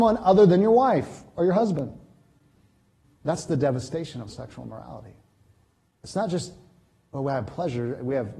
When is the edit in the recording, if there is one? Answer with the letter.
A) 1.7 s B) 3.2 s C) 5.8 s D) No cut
B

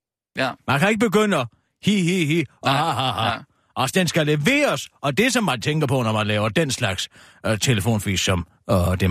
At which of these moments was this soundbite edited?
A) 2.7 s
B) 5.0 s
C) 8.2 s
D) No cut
D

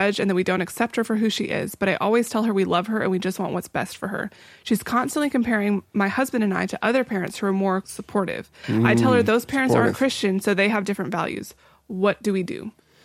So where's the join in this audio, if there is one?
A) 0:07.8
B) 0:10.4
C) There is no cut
A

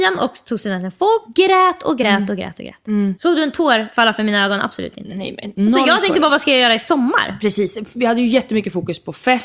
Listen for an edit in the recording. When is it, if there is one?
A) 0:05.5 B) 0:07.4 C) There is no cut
A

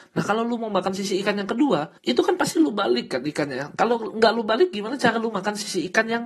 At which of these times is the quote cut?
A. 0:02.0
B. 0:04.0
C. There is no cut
A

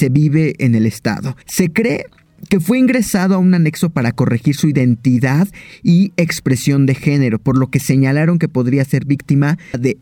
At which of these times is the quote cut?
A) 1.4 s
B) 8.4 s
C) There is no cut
A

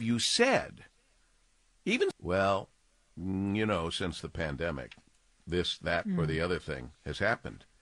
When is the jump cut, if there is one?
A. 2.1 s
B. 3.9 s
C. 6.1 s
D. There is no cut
A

